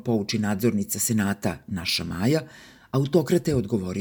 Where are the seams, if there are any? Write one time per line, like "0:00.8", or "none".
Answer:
none